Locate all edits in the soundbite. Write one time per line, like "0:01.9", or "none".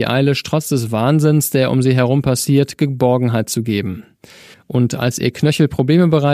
0:04.5